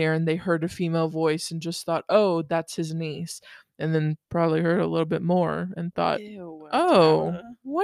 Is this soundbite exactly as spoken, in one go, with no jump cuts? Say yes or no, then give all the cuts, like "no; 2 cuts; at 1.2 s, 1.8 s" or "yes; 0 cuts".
yes; 0 cuts